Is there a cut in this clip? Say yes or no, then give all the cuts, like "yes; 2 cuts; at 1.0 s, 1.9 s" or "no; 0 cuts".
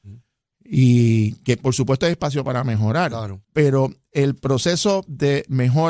yes; 1 cut; at 3.4 s